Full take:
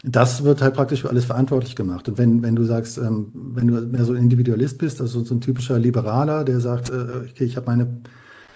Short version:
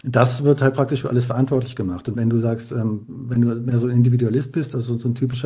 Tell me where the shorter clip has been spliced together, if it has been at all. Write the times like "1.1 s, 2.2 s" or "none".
2.2 s